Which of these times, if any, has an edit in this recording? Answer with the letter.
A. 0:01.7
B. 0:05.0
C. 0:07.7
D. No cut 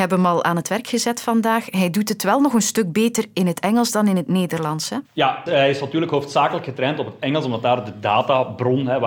B